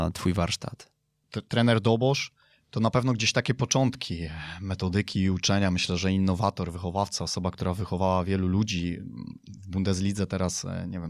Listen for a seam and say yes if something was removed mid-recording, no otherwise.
no